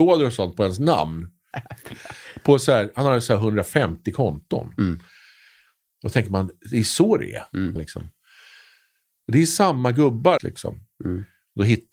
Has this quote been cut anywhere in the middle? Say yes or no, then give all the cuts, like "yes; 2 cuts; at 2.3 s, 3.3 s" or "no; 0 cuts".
yes; 3 cuts; at 1.5 s, 7.8 s, 10.4 s